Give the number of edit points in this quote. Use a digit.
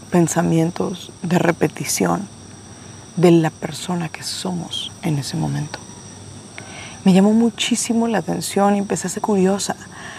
2